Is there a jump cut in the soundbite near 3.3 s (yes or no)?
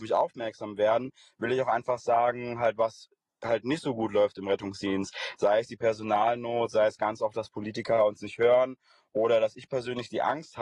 no